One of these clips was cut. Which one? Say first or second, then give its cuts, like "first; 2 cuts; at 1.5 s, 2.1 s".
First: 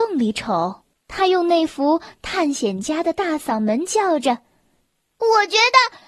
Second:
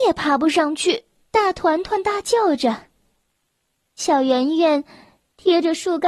second; 1 cut; at 1.2 s